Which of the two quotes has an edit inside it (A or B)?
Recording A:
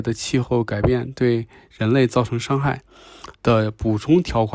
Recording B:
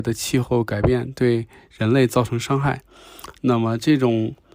A